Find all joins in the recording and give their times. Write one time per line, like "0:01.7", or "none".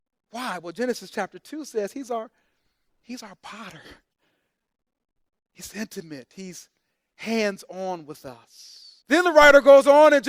0:09.0